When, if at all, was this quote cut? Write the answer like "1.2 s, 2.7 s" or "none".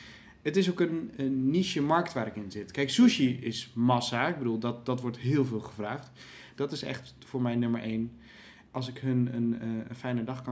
1.1 s, 6.6 s